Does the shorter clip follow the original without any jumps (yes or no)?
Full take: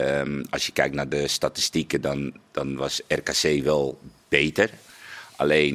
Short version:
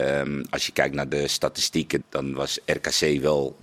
no